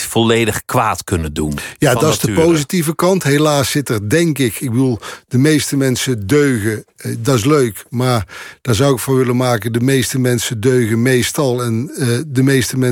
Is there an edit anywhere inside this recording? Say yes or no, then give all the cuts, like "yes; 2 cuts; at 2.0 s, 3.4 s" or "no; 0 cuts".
no; 0 cuts